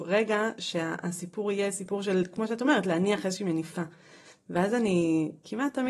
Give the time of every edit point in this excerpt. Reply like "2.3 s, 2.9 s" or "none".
none